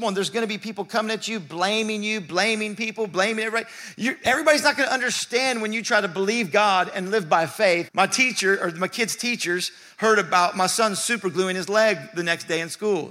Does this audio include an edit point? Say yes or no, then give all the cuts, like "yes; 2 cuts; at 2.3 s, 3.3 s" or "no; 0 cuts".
yes; 1 cut; at 7.9 s